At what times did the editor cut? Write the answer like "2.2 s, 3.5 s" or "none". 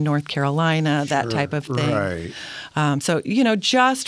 none